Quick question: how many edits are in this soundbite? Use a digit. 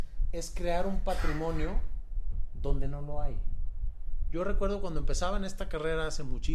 0